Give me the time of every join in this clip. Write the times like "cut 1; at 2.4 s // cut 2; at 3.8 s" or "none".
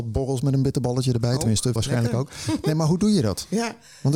cut 1; at 1.8 s